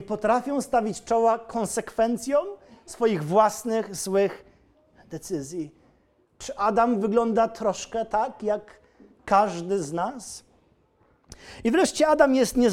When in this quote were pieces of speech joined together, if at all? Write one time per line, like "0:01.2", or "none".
0:06.2